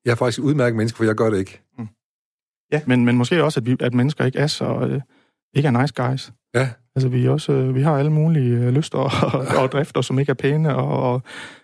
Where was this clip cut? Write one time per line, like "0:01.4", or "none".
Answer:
0:02.9